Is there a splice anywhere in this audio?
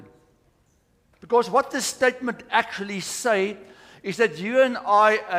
yes; 1 cut; at 1.1 s

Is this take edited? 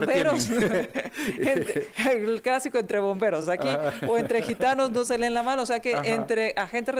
no; 0 cuts

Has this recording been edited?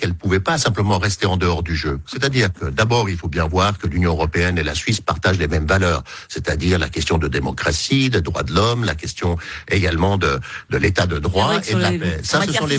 yes; 1 cut; at 2.0 s

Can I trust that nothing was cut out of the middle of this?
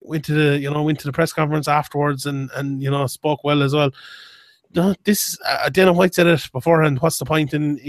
yes; 0 cuts

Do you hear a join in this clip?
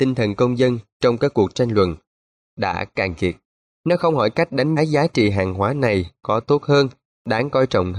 yes; 2 cuts; at 3.7 s, 4.8 s

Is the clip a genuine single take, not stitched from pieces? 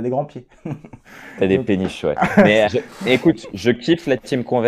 no; 1 cut; at 2.7 s

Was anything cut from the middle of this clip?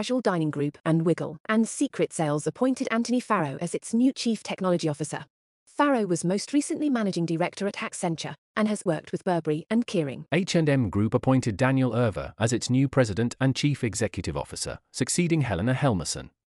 yes; 1 cut; at 8.9 s

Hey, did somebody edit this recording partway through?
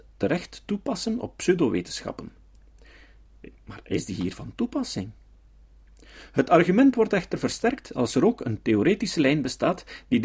no; 0 cuts

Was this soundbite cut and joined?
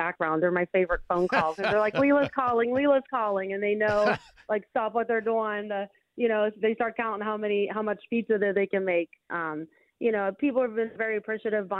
yes; 2 cuts; at 6.6 s, 9.3 s

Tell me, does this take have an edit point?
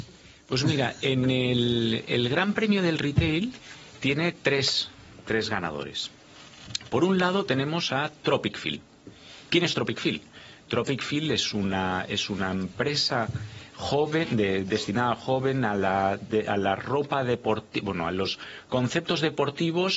no; 0 cuts

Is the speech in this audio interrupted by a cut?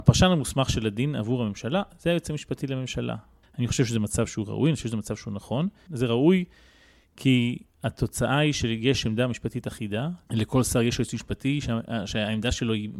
yes; 3 cuts; at 3.4 s, 5.9 s, 10.3 s

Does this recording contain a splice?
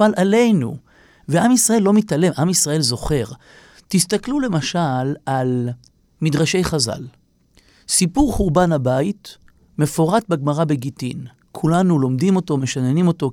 no; 0 cuts

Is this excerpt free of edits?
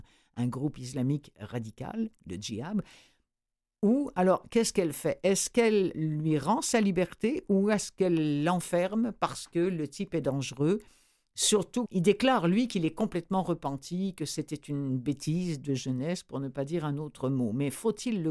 no; 2 cuts; at 11.9 s, 15.6 s

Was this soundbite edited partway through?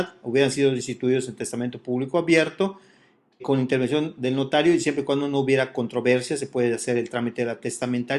yes; 1 cut; at 3.4 s

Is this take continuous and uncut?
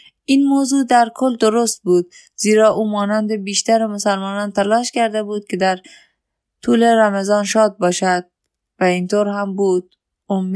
yes; 0 cuts

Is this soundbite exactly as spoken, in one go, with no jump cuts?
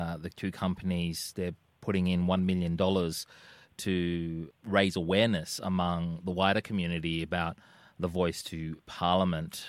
yes; 0 cuts

